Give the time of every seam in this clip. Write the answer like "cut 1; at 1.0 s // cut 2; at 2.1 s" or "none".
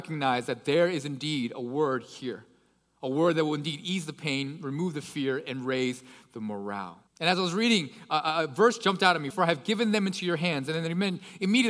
cut 1; at 7.1 s // cut 2; at 9.3 s